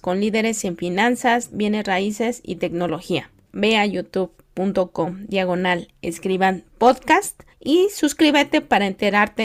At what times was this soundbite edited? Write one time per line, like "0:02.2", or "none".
0:01.5
0:03.5
0:07.5